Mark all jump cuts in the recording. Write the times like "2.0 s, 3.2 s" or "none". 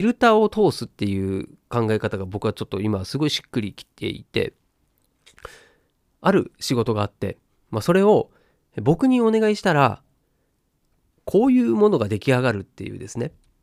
none